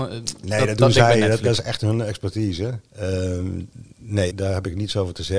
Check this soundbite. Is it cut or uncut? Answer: cut